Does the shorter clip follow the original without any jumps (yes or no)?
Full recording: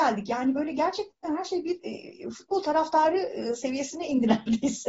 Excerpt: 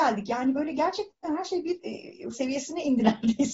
no